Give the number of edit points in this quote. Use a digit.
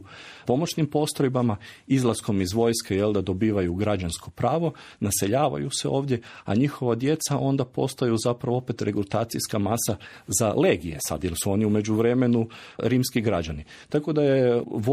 0